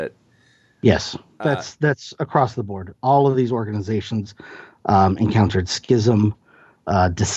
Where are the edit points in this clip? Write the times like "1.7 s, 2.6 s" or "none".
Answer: none